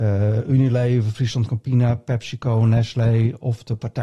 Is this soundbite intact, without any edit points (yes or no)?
yes